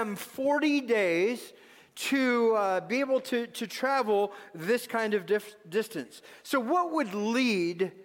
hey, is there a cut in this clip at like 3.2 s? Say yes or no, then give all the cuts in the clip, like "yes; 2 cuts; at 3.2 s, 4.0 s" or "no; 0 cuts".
no; 0 cuts